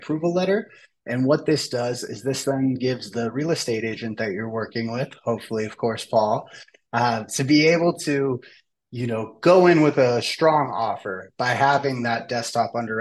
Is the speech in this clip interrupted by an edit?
no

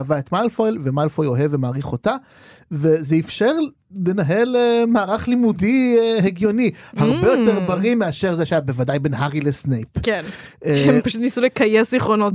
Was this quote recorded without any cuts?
yes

